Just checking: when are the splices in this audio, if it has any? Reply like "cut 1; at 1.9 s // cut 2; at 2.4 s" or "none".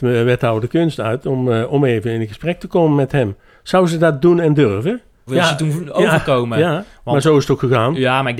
cut 1; at 5.3 s